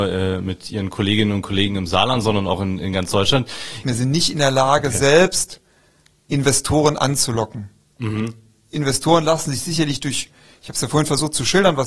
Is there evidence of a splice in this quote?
yes; 1 cut; at 3.8 s

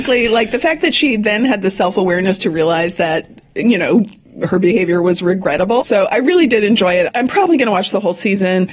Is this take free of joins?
no; 1 cut; at 5.8 s

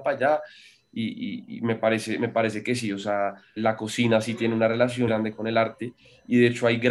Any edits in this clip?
yes; 2 cuts; at 3.6 s, 5.1 s

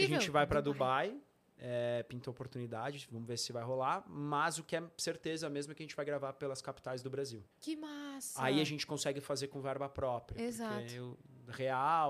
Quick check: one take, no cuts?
no; 1 cut; at 7.5 s

